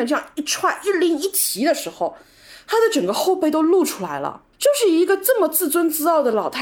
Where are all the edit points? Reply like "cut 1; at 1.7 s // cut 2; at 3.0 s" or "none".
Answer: cut 1; at 4.5 s